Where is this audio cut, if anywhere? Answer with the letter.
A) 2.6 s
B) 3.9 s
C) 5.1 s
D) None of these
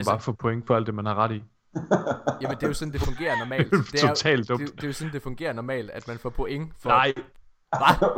D